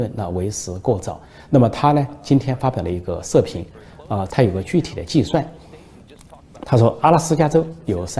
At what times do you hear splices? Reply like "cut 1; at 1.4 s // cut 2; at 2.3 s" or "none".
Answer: cut 1; at 1.5 s // cut 2; at 4.3 s

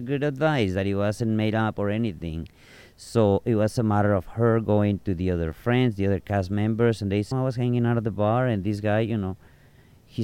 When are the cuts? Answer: cut 1; at 7.3 s

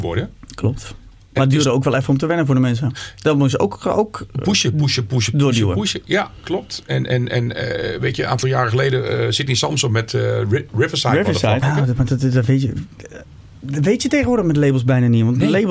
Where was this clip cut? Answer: cut 1; at 11.6 s

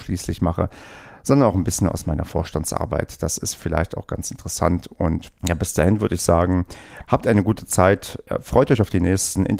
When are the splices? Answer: cut 1; at 5.4 s

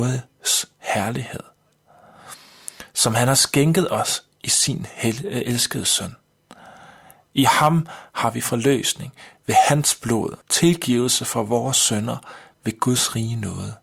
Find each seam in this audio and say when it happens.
cut 1; at 10.4 s

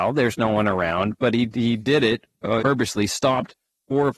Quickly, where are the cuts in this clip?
cut 1; at 2.6 s

